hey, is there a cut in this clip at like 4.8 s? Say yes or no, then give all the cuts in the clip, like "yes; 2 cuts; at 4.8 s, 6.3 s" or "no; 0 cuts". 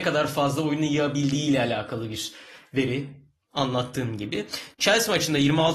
yes; 1 cut; at 4.8 s